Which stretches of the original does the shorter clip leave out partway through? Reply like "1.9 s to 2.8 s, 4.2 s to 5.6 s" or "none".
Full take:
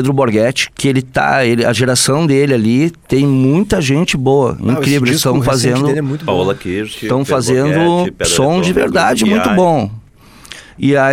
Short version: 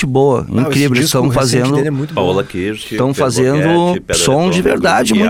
none